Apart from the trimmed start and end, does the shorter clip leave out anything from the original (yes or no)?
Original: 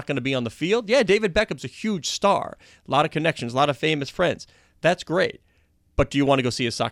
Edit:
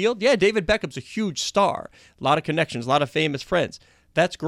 no